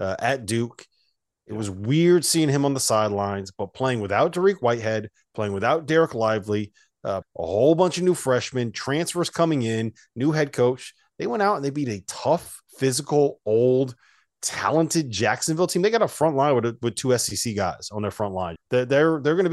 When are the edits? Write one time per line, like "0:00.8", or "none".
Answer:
0:07.2
0:12.7
0:18.6